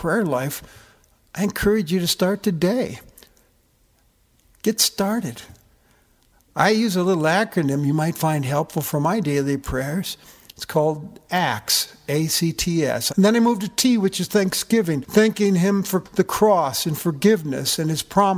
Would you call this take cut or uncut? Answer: cut